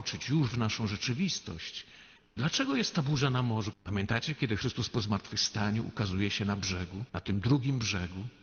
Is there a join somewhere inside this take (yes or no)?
yes